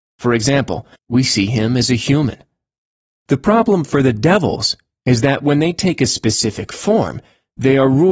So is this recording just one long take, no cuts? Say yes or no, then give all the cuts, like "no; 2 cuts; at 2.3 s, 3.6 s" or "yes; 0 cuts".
no; 2 cuts; at 1.0 s, 3.1 s